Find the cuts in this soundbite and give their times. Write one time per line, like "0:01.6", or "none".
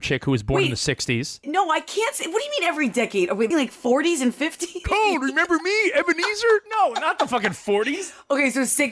0:01.4
0:03.5
0:04.8